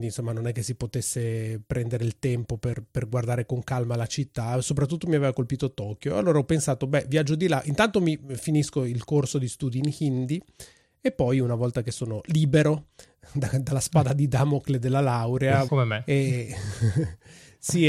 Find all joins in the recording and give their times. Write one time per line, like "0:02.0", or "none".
0:15.7

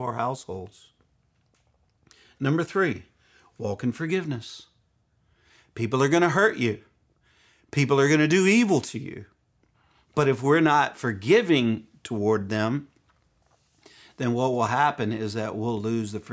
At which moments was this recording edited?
none

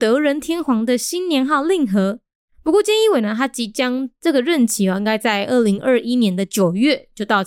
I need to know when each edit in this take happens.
0:02.5

